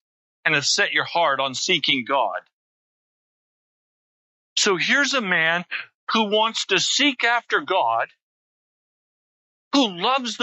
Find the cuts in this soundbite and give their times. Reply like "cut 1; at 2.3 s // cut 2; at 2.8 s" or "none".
none

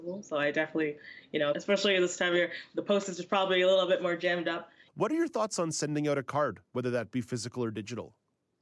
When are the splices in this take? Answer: cut 1; at 1.5 s // cut 2; at 4.9 s

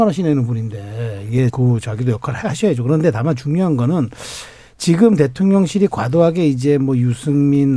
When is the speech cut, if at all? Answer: cut 1; at 1.5 s

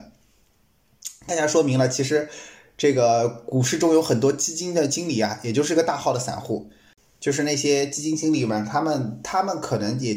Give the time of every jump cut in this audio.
cut 1; at 1.3 s

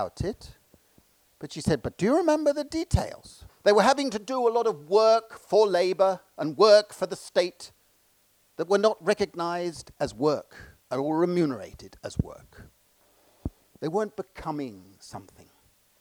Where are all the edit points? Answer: cut 1; at 3.5 s // cut 2; at 10.8 s // cut 3; at 13.8 s

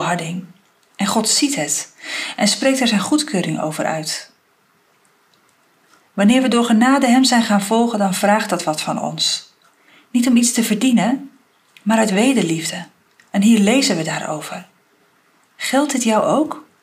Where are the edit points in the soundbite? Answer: none

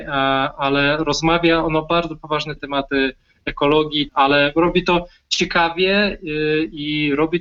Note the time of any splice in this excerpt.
cut 1; at 2.6 s // cut 2; at 4.1 s

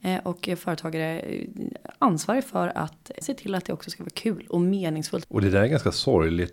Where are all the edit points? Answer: cut 1; at 3.2 s // cut 2; at 5.2 s

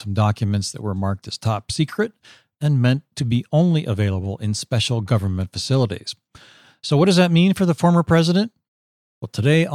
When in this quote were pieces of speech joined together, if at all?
none

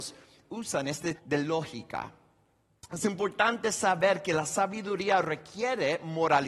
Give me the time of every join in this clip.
cut 1; at 1.2 s

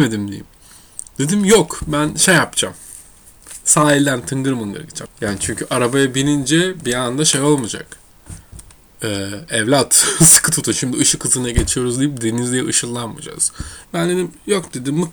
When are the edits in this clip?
cut 1; at 5.0 s // cut 2; at 8.8 s // cut 3; at 13.8 s

